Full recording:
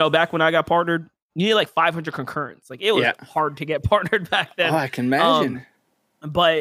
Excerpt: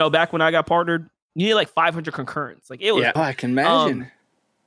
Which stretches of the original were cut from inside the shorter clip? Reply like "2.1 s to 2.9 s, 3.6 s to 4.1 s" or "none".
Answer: 3.2 s to 4.7 s